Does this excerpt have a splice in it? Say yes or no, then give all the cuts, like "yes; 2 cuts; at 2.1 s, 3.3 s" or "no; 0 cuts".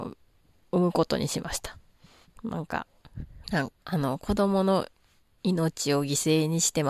yes; 1 cut; at 3.4 s